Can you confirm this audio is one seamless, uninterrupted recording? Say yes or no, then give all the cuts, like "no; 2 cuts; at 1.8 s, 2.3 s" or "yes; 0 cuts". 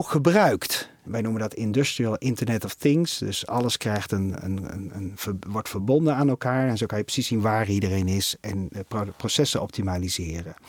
yes; 0 cuts